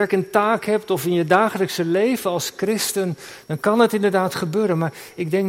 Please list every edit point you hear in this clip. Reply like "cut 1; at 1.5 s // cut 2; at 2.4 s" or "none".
none